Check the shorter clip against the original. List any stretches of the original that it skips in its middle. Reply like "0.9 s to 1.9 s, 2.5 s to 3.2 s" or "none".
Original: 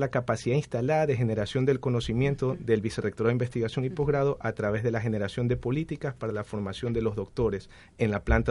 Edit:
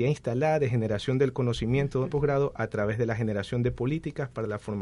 2.6 s to 4.0 s